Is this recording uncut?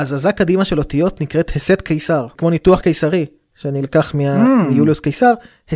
yes; 0 cuts

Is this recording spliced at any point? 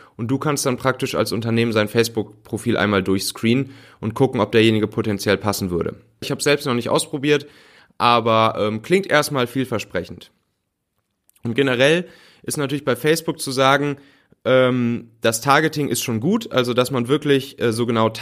yes; 1 cut; at 6.2 s

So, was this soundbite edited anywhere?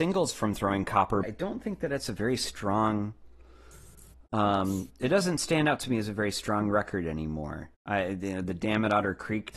yes; 1 cut; at 1.2 s

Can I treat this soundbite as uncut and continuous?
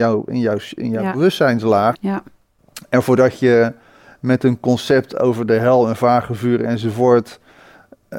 no; 1 cut; at 1.9 s

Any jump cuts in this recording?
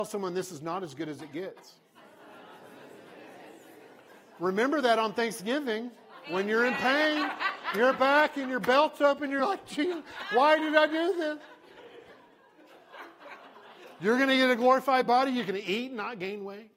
no; 0 cuts

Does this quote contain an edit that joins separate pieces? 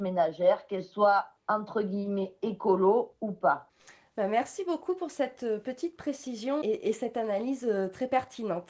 yes; 1 cut; at 6.6 s

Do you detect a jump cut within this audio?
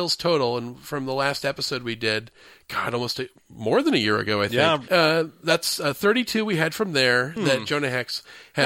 yes; 2 cuts; at 4.9 s, 7.4 s

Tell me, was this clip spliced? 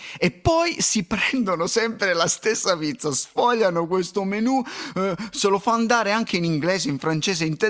no; 0 cuts

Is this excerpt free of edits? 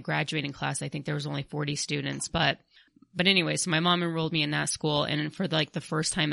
yes; 0 cuts

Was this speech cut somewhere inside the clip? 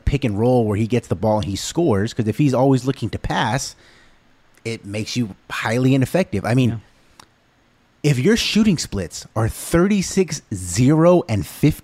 no; 0 cuts

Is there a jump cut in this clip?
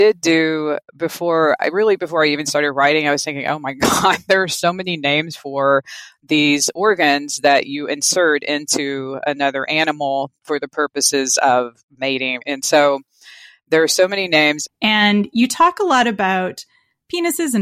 yes; 2 cuts; at 12.4 s, 14.6 s

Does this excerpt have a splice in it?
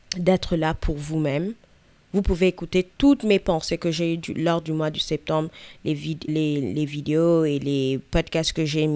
yes; 1 cut; at 6.3 s

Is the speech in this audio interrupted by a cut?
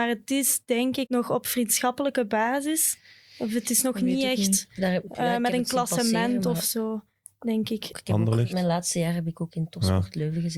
yes; 2 cuts; at 1.1 s, 7.9 s

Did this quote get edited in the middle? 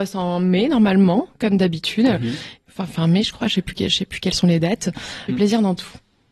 yes; 1 cut; at 5.3 s

